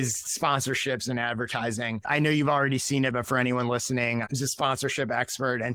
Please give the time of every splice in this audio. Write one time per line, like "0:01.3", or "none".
0:04.2

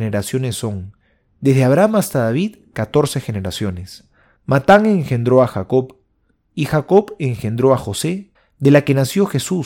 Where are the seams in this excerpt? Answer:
0:04.4
0:08.3

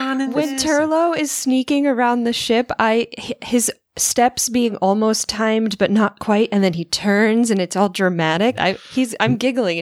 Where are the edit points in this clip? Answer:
0:08.6

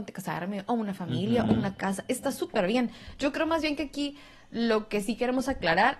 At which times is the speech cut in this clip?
none

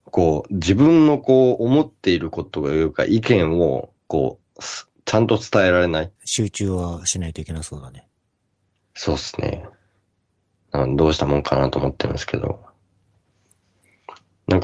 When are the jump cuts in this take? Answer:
0:02.5
0:06.2

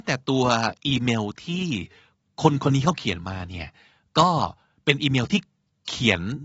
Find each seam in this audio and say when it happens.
none

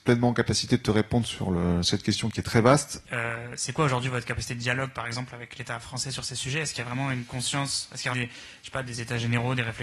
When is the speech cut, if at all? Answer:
0:03.0
0:08.1

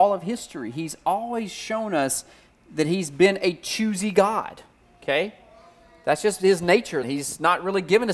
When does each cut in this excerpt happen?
0:07.0

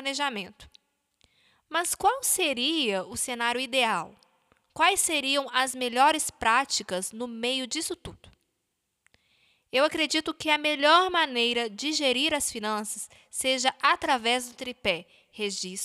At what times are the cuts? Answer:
none

